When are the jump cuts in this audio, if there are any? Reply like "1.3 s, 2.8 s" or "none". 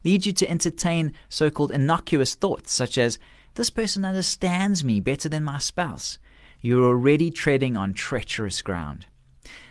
none